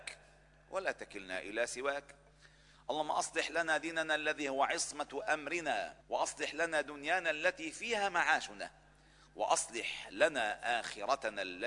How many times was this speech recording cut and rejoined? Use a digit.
1